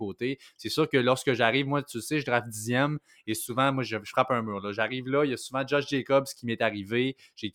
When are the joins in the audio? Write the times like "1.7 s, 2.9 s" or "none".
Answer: none